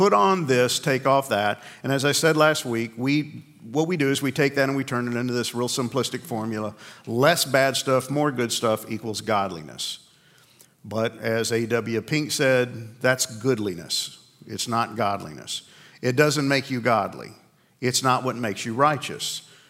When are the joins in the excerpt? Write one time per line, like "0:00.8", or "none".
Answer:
none